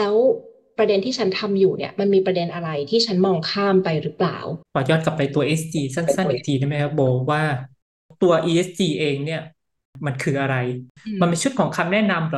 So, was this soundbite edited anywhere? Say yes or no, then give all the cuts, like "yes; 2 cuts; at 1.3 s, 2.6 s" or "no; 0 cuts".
yes; 1 cut; at 4.6 s